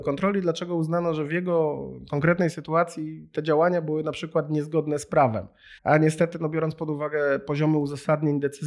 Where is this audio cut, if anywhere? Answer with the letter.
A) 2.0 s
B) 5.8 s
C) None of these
B